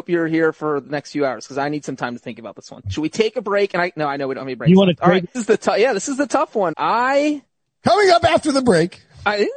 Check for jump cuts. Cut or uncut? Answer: cut